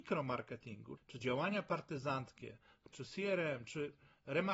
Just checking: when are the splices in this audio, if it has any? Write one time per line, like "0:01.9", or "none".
0:01.0
0:02.9